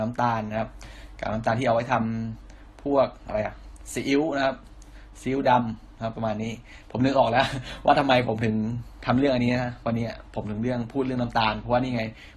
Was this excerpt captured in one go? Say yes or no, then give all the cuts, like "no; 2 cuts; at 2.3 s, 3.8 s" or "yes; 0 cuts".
yes; 0 cuts